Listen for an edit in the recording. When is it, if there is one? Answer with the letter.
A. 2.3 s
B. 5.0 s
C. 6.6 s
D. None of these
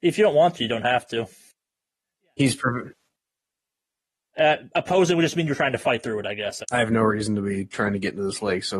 C